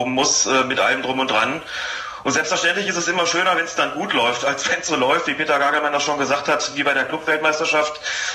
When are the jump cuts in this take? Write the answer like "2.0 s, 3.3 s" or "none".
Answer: none

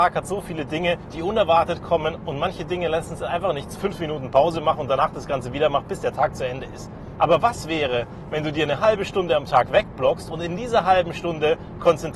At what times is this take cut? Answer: 3.8 s, 7.2 s

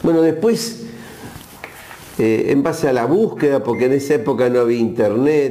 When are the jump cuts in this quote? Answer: none

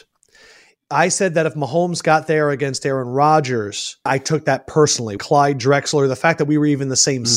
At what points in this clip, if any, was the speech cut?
4.1 s, 5.2 s

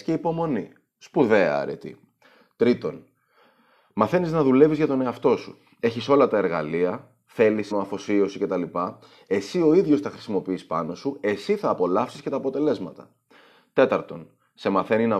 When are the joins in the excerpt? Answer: 7.7 s

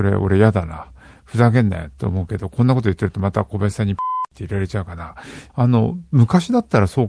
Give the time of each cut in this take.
5.5 s

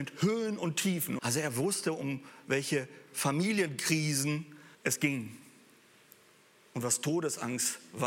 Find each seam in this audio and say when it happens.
1.2 s, 4.7 s

